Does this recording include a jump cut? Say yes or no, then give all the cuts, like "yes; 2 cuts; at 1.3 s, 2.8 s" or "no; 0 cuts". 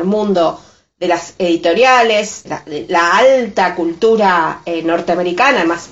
yes; 1 cut; at 2.5 s